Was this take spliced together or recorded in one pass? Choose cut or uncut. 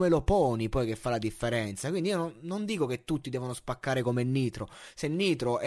uncut